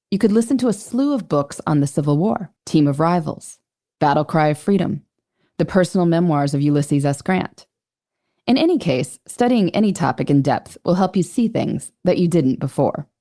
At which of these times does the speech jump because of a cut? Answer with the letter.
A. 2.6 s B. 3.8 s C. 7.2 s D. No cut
A